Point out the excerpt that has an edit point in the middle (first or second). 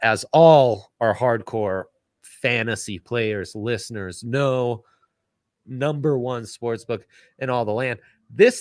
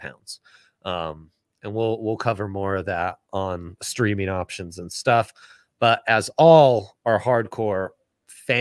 first